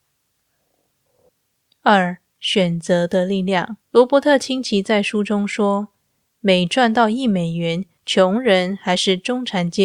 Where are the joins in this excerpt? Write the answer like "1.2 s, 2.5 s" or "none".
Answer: 3.8 s, 8.0 s